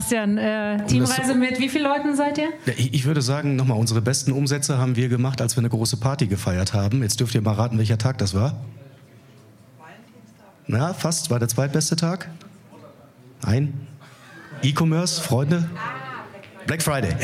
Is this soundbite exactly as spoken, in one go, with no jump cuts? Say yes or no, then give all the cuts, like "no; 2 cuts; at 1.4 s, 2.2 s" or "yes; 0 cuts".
yes; 0 cuts